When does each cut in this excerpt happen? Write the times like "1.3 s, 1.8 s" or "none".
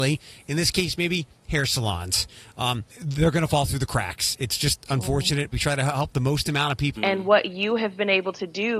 2.9 s, 5.5 s, 7.0 s